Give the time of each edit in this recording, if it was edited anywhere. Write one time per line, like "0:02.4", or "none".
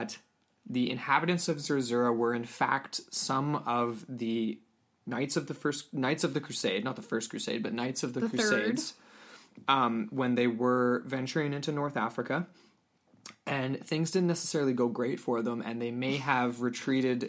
none